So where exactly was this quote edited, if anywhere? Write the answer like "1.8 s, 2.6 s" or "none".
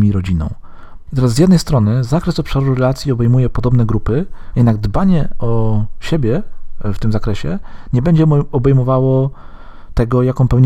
1.1 s, 4.5 s

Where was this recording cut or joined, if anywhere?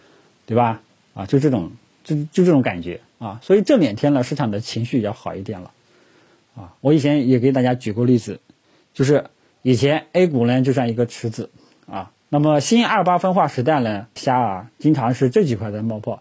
12.2 s, 14.2 s

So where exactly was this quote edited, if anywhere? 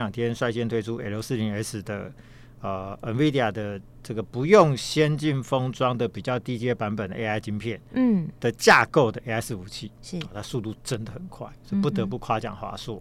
none

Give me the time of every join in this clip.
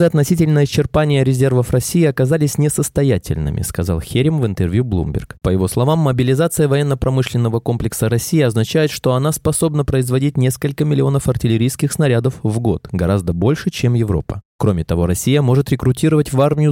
none

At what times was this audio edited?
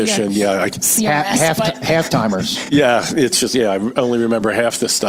none

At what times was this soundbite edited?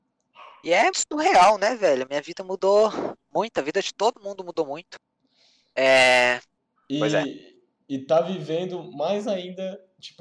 0.9 s, 6.8 s

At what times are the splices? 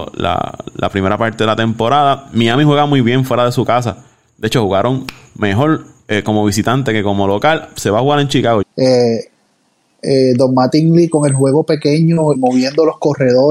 8.6 s, 12.3 s

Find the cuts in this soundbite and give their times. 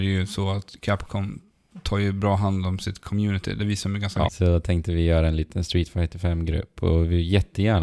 4.3 s

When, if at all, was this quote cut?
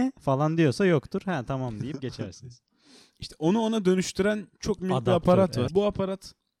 5.7 s

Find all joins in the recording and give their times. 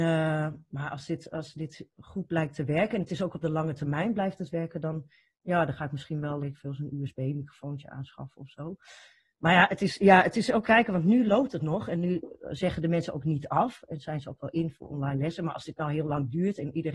6.4 s, 10.6 s

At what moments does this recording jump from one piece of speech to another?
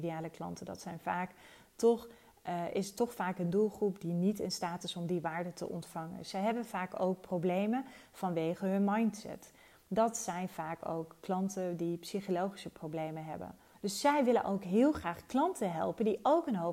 13.7 s

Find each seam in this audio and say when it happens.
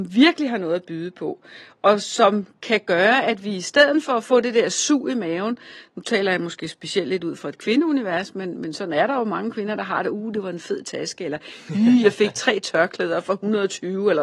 none

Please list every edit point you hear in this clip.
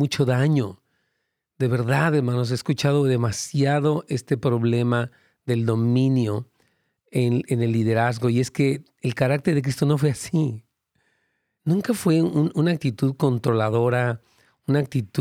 11.6 s

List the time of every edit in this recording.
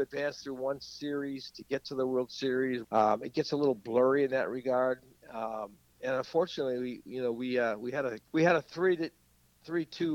2.8 s, 8.3 s

